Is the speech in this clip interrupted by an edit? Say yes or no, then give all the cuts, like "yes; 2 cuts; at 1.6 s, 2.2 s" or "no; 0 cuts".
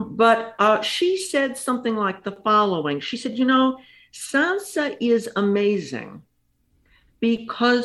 no; 0 cuts